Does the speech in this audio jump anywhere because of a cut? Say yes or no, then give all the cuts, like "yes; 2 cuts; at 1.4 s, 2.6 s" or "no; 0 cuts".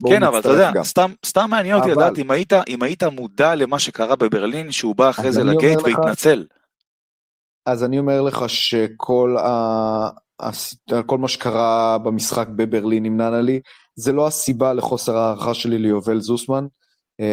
no; 0 cuts